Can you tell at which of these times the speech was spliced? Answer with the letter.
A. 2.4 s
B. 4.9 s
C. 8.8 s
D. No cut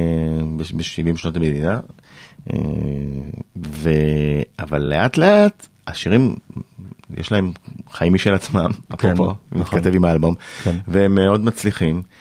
D